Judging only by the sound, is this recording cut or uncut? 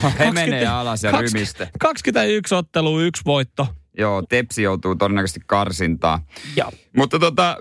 cut